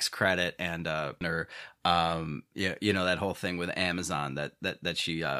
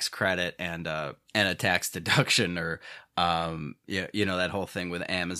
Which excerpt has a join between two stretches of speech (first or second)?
first